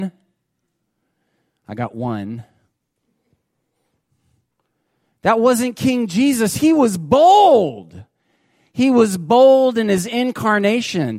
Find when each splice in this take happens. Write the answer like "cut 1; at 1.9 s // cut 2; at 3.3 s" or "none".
none